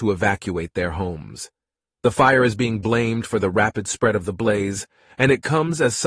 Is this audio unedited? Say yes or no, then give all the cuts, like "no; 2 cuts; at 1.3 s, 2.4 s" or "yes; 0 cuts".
yes; 0 cuts